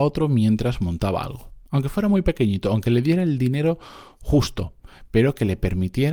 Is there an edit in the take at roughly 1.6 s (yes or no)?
yes